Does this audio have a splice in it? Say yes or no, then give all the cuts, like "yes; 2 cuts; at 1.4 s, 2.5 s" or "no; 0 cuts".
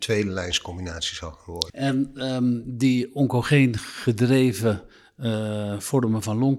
yes; 1 cut; at 1.7 s